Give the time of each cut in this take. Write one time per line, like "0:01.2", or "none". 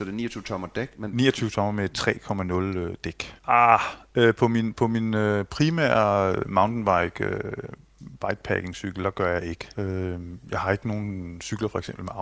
0:03.4
0:09.7